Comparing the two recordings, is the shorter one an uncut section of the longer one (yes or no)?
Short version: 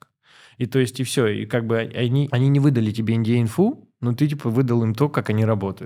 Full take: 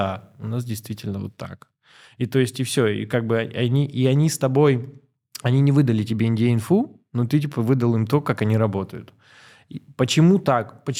no